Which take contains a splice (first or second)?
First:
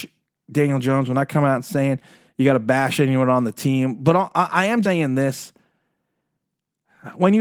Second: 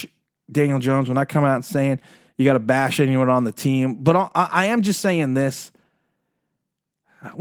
first